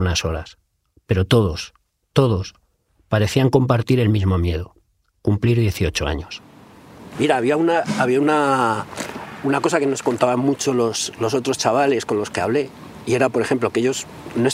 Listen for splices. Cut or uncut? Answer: uncut